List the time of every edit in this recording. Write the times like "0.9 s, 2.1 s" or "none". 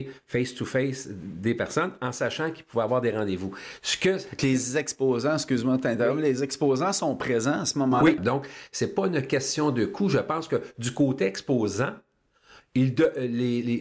8.2 s